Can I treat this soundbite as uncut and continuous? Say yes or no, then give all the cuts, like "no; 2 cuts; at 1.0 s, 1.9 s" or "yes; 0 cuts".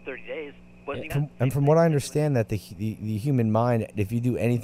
no; 1 cut; at 1.1 s